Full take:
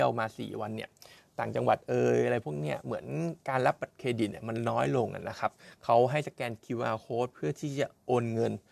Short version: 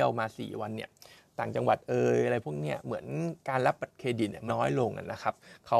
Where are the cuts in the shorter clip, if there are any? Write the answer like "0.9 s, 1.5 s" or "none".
4.5 s